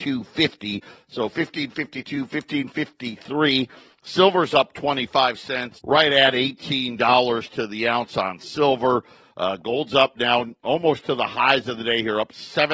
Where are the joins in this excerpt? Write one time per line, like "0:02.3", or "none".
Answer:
0:05.8
0:09.2